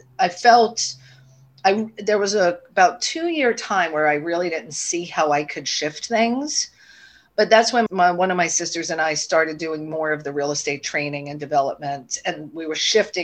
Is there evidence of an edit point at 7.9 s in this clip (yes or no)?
yes